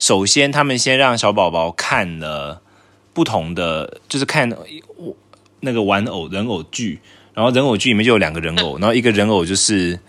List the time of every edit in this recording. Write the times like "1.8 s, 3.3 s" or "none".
none